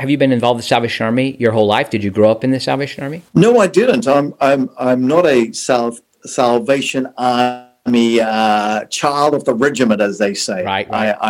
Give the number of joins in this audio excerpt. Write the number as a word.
one